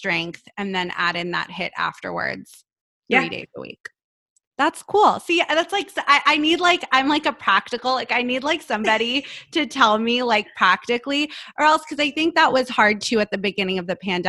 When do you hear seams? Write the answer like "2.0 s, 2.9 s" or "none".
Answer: none